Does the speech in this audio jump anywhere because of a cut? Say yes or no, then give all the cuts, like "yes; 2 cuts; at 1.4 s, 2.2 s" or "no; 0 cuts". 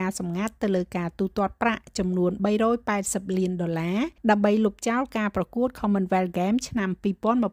yes; 1 cut; at 4.2 s